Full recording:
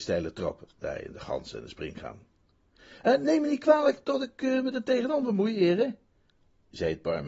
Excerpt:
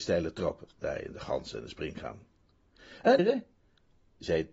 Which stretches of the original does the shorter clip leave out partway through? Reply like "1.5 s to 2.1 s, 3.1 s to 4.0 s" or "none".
3.2 s to 5.7 s

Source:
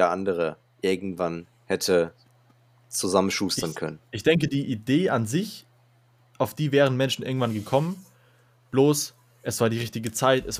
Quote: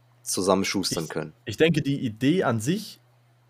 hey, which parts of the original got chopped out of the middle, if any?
none

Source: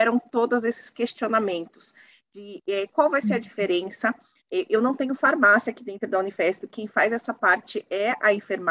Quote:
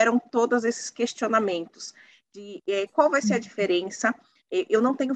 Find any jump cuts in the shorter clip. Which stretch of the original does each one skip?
none

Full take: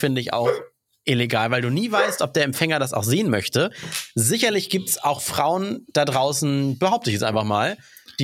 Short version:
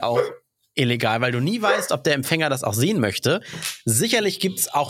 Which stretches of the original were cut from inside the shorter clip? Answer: none

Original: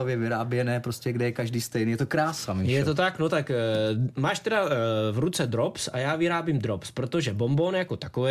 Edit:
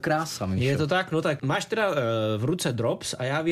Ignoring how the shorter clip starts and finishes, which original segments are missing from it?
3.5 s to 4.1 s

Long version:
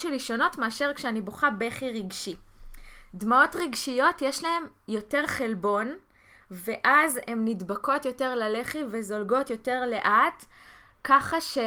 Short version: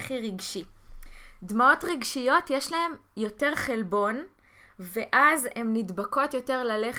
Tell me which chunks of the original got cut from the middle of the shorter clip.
none

